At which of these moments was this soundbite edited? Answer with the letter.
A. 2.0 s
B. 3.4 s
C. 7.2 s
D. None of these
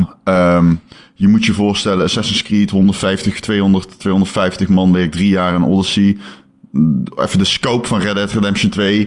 D